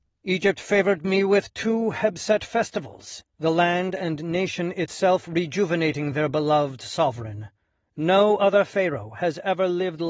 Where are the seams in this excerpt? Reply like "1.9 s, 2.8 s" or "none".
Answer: 3.2 s